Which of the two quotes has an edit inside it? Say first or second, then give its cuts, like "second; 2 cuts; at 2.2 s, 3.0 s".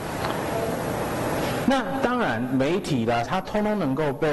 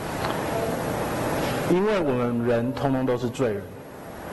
first; 2 cuts; at 1.6 s, 3.2 s